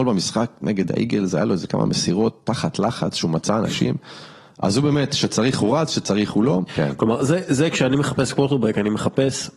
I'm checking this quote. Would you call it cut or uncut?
cut